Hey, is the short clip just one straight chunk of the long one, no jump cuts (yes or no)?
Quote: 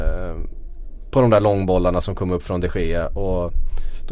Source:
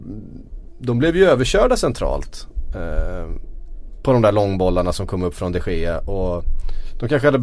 yes